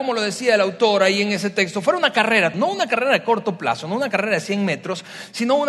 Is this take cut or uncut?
cut